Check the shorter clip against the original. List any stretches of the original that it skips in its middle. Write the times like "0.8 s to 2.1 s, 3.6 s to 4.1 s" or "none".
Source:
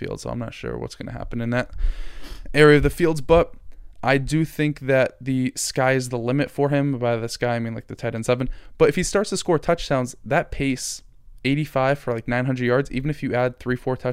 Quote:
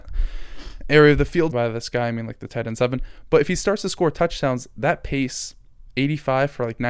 3.1 s to 7.0 s